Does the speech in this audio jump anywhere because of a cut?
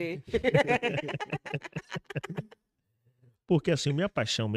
no; 0 cuts

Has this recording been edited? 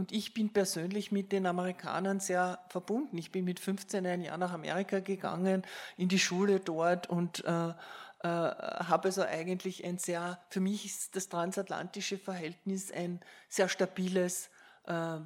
no; 0 cuts

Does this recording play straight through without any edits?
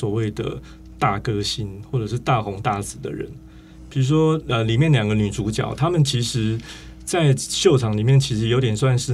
yes; 0 cuts

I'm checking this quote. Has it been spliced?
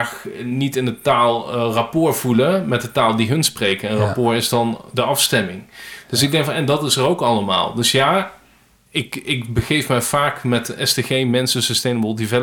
no; 0 cuts

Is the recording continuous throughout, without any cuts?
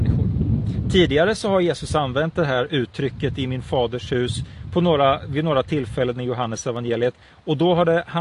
yes; 0 cuts

